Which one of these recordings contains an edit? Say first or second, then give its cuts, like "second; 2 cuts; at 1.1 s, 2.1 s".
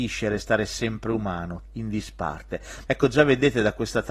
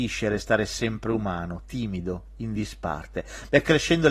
first; 2 cuts; at 1.6 s, 2.9 s